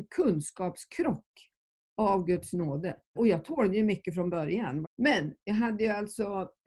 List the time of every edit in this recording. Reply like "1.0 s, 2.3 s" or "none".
3.2 s, 4.8 s